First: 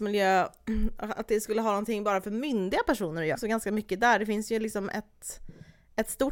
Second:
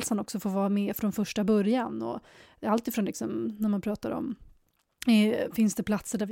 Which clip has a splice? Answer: first; 1 cut; at 3.3 s

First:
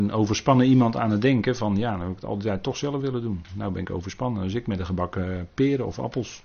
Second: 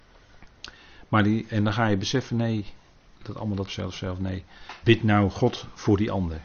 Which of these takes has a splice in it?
second; 2 cuts; at 3.7 s, 4.8 s

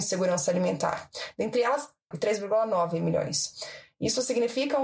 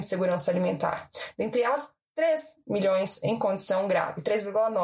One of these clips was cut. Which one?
first; 1 cut; at 2.1 s

